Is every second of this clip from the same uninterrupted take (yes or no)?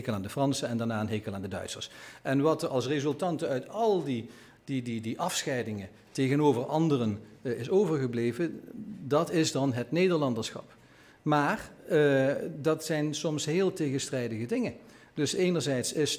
yes